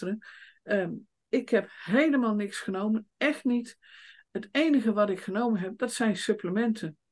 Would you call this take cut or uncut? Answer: uncut